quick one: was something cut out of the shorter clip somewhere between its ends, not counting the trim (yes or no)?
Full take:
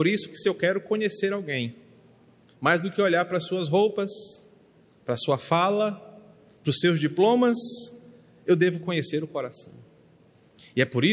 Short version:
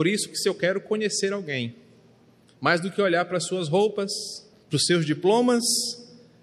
yes